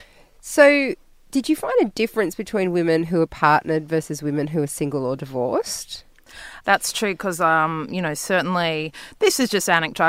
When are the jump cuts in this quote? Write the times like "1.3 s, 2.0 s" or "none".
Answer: 6.6 s